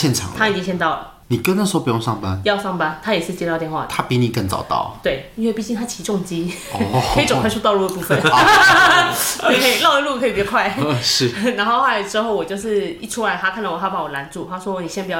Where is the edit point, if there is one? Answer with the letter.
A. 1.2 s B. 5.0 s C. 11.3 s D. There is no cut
A